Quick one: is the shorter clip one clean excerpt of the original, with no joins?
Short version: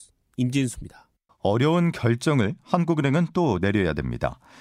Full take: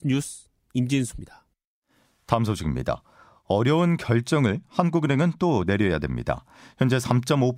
no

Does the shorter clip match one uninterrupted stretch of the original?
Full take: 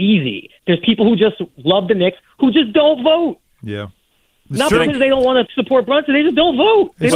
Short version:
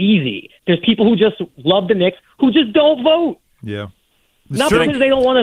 yes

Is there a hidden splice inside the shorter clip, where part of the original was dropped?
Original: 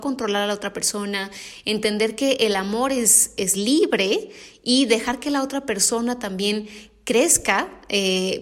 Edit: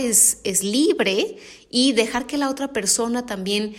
no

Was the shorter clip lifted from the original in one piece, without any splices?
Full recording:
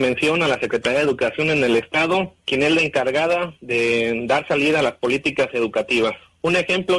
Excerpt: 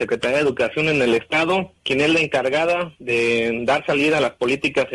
yes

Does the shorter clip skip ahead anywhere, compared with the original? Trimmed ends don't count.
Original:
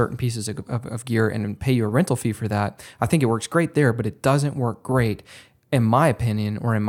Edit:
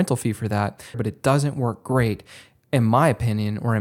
yes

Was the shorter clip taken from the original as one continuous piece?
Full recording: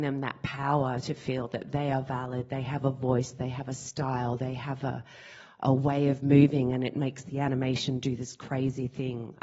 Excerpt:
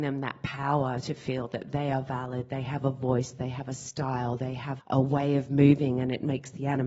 no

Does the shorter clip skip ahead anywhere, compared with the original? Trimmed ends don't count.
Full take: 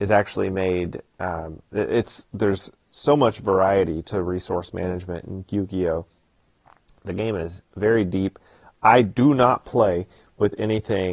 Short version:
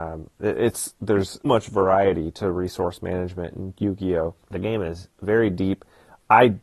yes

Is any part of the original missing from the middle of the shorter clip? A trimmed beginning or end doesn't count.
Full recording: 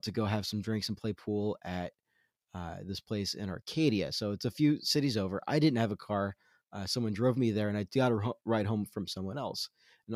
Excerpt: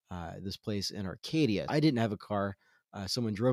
yes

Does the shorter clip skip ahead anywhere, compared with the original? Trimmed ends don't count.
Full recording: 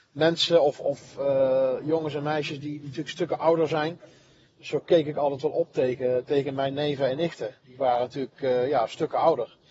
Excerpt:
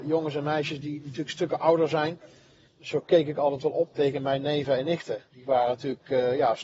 yes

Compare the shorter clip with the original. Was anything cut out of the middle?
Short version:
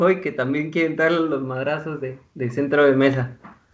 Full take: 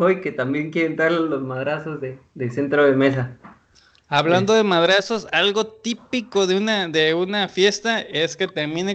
no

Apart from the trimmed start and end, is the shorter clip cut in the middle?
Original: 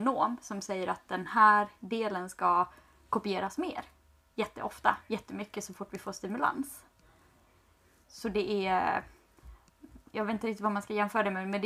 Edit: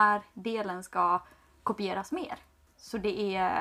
yes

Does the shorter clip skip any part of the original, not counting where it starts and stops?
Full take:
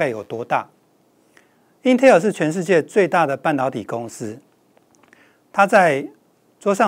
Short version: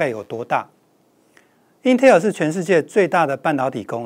no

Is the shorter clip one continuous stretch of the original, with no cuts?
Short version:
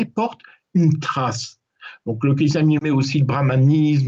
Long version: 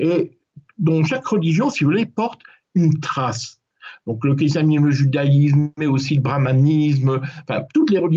no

